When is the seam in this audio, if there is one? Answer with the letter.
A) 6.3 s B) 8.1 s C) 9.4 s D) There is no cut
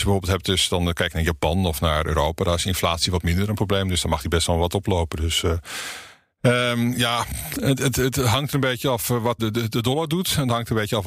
C